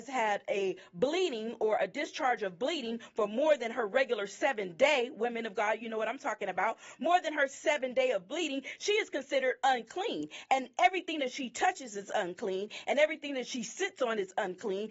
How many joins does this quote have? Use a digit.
0